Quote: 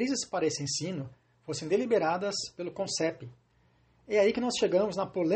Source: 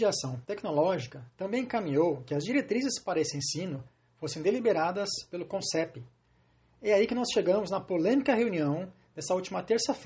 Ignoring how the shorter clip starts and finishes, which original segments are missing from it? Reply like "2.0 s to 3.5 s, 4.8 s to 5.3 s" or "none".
none